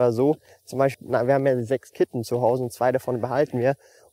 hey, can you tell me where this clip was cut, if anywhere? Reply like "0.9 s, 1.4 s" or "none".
0.9 s